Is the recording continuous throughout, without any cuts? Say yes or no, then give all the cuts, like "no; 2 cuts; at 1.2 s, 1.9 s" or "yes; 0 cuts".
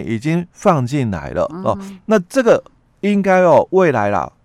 yes; 0 cuts